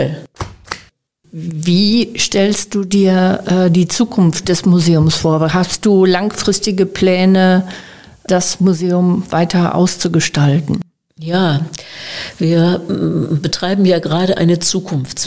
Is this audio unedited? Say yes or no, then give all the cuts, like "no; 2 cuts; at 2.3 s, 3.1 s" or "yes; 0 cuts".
yes; 0 cuts